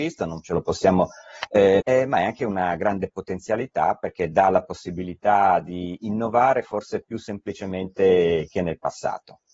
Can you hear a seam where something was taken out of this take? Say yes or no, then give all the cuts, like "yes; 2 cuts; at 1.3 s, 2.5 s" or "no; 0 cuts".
yes; 1 cut; at 1.8 s